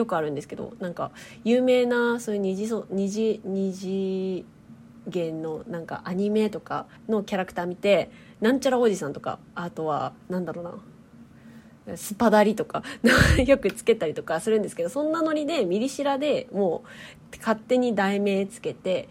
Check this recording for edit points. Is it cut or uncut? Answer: cut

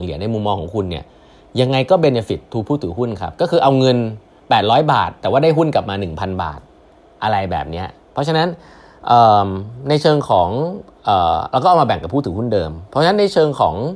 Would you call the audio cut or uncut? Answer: uncut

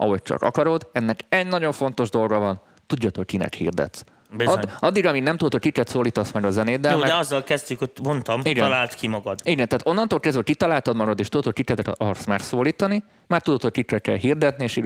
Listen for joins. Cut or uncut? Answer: uncut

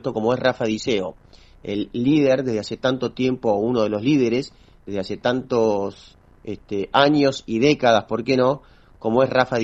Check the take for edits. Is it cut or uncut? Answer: uncut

